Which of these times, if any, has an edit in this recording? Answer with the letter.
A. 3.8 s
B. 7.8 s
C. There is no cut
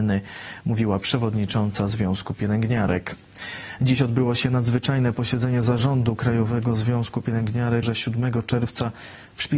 B